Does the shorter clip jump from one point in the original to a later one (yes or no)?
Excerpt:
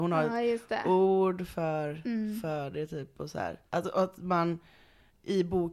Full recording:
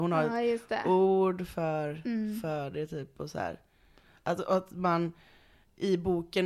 yes